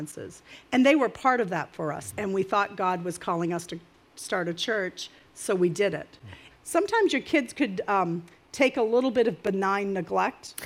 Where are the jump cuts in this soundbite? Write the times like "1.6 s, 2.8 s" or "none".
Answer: 2.1 s, 6.5 s

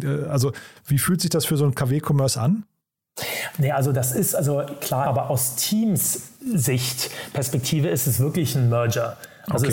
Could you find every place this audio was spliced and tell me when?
5.0 s

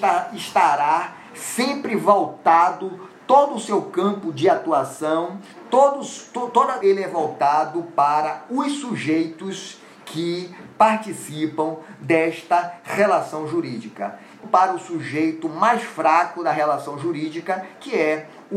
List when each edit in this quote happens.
6.8 s, 14.4 s

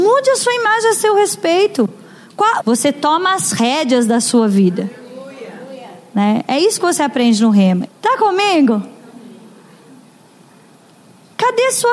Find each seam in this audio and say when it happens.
2.6 s, 7.9 s

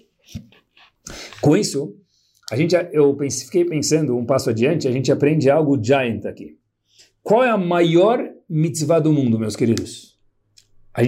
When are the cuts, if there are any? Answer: none

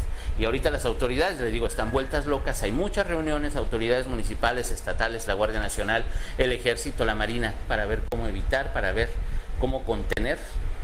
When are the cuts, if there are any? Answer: 5.3 s, 7.6 s

